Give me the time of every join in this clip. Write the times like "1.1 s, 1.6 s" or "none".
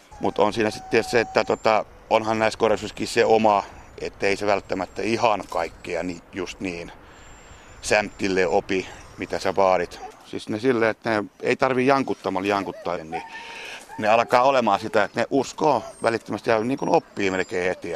10.1 s, 13.0 s